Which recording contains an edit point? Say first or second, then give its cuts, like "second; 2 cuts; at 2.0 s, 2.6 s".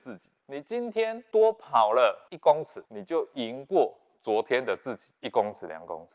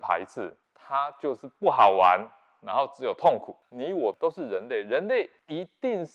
first; 1 cut; at 2.9 s